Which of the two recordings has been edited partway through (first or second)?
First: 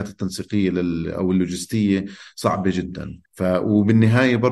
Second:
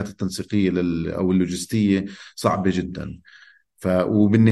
first